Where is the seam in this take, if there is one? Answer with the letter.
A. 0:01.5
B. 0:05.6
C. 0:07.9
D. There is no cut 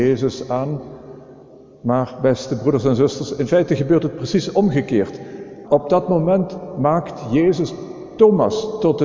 B